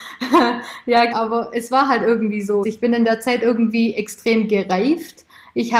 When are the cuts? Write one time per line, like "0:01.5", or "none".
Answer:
0:01.1
0:02.6